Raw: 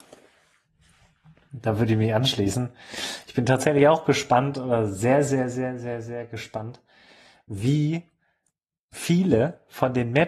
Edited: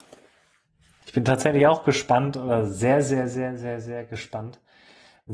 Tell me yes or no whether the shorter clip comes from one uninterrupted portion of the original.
no